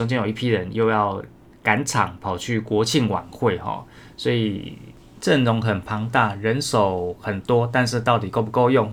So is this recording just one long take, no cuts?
yes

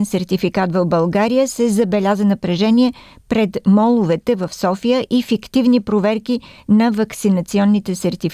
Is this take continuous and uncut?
yes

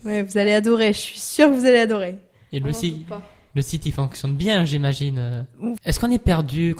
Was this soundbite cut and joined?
yes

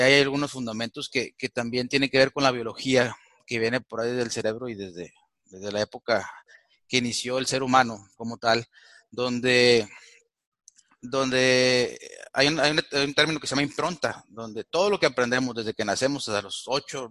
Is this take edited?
no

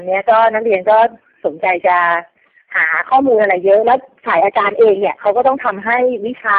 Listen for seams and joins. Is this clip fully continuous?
yes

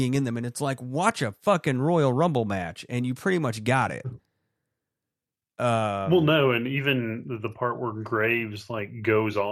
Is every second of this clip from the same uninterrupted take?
yes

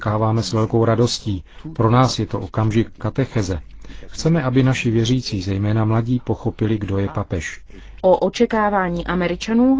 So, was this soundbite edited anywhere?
yes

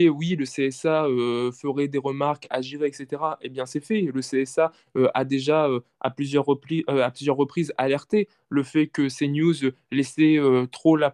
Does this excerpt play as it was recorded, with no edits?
yes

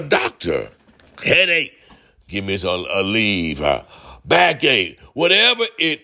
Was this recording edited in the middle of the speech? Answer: no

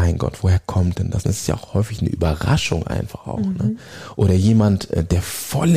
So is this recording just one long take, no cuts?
yes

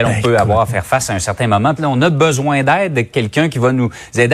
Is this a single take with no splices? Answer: no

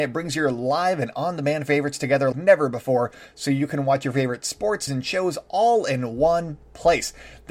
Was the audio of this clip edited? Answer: yes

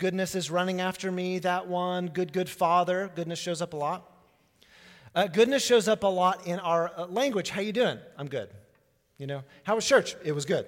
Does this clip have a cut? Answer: no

